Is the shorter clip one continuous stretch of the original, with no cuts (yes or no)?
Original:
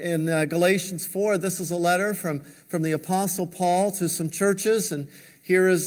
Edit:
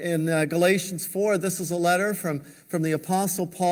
yes